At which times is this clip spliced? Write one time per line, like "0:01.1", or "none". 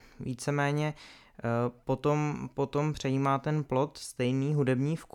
none